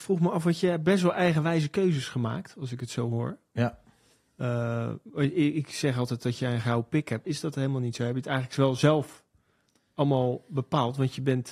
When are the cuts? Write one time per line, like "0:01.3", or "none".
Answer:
0:07.2